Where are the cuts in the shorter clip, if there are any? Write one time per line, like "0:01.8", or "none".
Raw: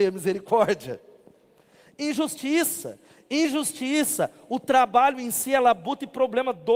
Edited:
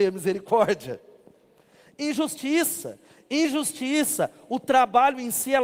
none